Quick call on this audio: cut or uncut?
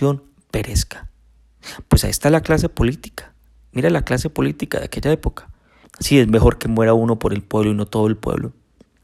cut